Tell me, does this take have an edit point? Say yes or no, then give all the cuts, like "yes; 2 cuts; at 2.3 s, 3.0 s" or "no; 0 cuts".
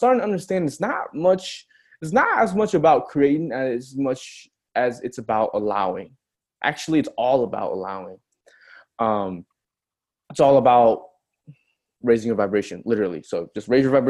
no; 0 cuts